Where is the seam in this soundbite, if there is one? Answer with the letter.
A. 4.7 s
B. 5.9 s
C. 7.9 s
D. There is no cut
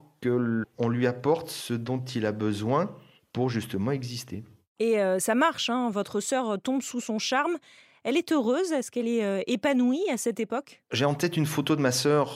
D